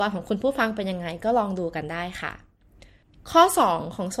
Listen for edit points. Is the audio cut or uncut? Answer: uncut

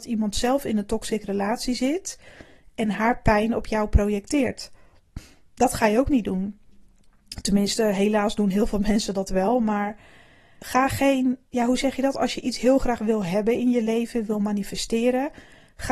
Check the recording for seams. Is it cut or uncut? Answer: cut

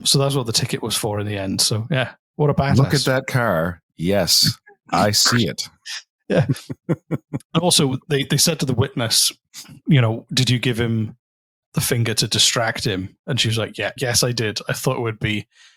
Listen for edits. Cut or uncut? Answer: cut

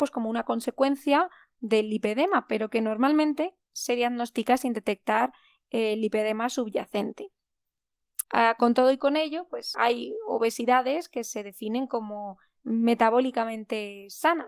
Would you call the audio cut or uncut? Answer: cut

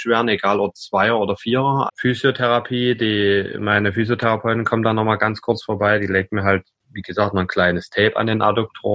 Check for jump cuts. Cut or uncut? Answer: cut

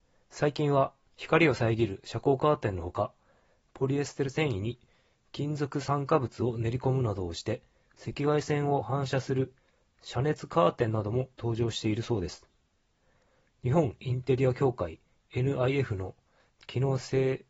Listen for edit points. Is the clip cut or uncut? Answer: uncut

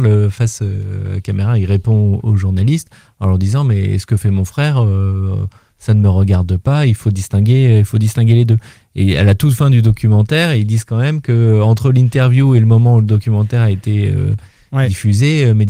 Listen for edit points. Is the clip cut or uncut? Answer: uncut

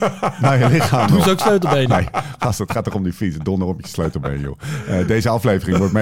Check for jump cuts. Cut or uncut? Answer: uncut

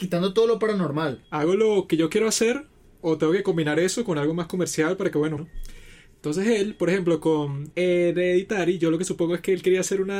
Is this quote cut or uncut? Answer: cut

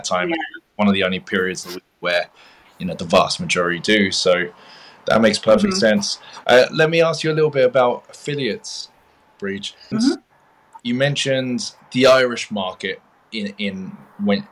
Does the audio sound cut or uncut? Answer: cut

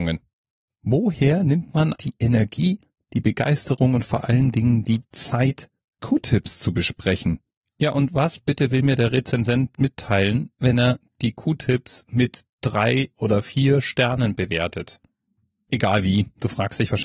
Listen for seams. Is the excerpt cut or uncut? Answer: cut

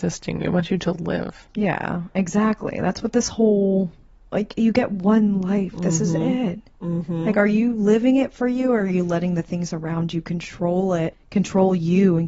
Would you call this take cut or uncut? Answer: uncut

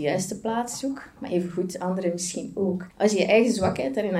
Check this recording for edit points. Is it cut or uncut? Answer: cut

